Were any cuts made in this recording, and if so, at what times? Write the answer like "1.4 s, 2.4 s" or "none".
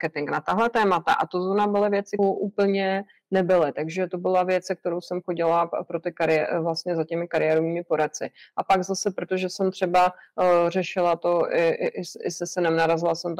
2.2 s